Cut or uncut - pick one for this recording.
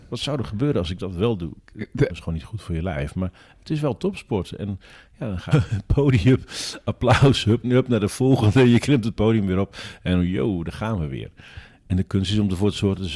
cut